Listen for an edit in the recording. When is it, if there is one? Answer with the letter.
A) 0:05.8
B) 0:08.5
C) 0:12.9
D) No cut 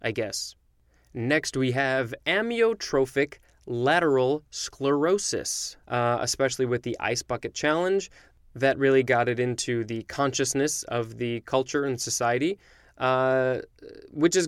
A